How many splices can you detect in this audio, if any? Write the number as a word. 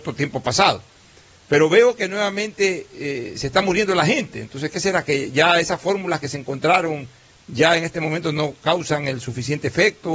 zero